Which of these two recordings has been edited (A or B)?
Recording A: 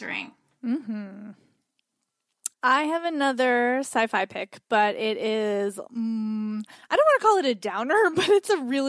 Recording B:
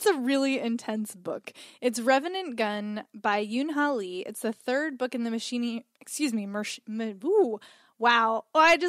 A